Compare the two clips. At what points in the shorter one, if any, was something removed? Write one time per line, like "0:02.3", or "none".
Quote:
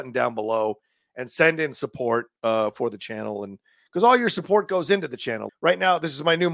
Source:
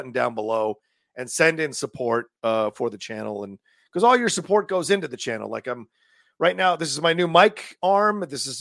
0:05.5

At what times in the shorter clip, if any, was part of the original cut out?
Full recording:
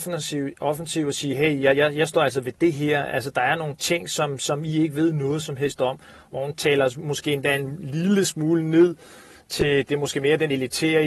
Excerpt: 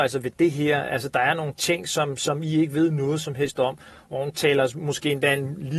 none

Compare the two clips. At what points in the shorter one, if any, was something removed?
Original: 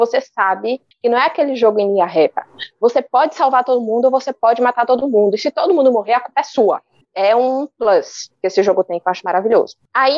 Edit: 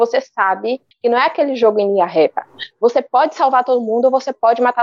none

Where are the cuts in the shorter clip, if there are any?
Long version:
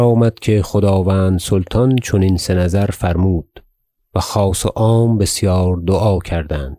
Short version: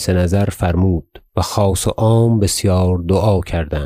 0:01.3

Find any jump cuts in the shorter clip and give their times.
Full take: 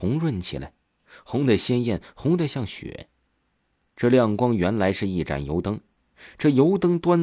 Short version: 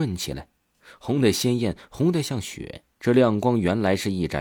0:02.9

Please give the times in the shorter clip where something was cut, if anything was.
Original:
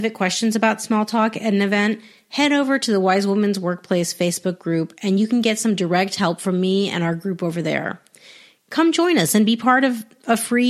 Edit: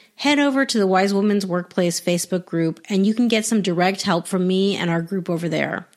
none

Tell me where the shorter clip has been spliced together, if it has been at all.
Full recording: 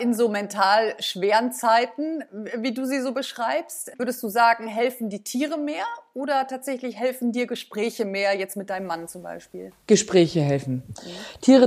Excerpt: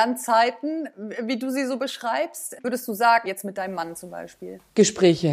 0:03.3

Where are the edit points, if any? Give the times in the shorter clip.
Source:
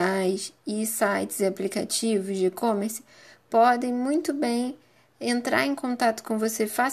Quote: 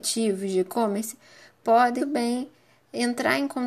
0:02.0

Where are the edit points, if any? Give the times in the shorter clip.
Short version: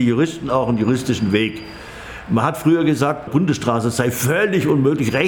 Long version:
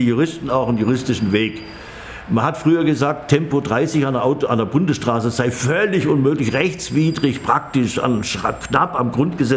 0:03.3

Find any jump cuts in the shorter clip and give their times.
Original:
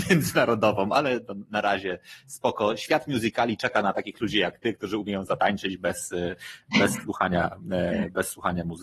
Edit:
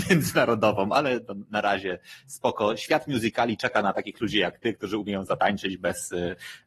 none

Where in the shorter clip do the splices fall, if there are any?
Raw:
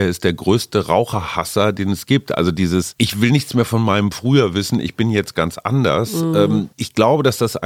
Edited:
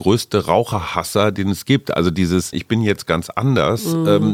0:02.5

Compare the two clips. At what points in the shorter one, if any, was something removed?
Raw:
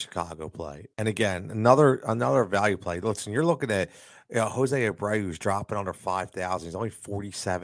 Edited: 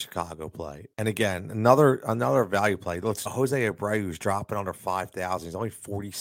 0:03.3

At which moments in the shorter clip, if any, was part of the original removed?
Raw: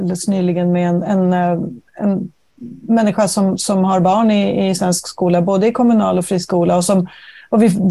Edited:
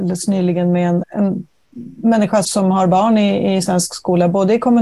0:01.0
0:02.4

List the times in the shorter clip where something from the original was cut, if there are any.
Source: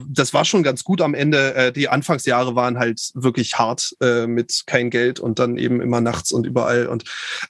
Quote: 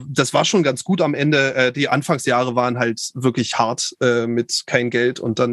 none

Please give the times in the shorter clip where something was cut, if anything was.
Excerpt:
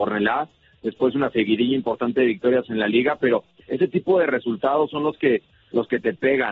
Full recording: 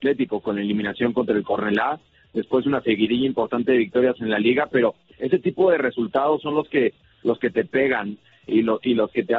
none

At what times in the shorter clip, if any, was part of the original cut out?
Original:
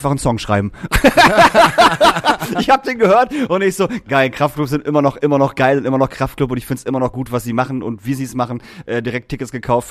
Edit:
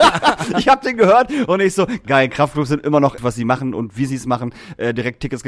0:03.2

